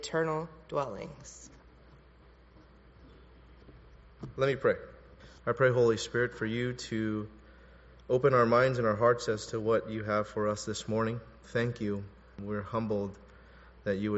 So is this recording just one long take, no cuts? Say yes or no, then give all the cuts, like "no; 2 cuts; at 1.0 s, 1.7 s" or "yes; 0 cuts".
yes; 0 cuts